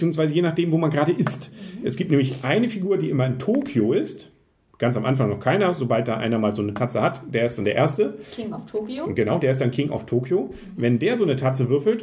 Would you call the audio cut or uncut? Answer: uncut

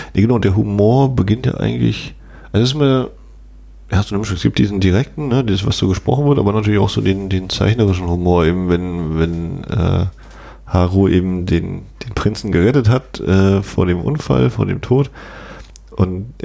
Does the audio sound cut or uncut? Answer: uncut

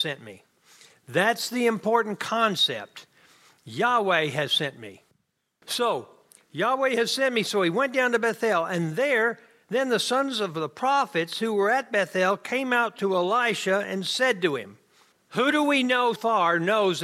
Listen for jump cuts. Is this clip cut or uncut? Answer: cut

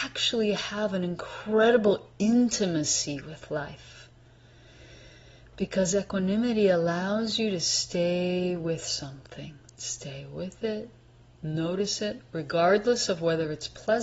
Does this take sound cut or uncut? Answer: uncut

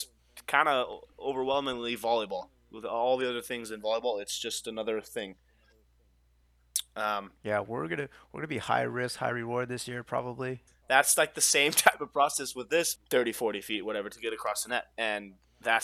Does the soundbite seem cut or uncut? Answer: cut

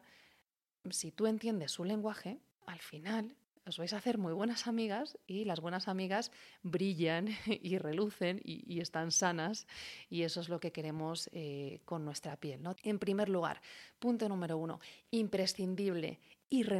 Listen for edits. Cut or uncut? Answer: cut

